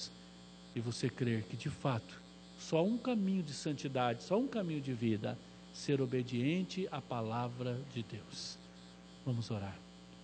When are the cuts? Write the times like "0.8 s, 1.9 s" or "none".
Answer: none